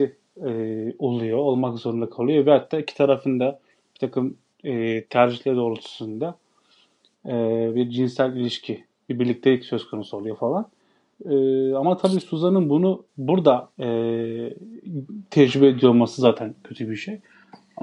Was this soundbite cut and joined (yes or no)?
yes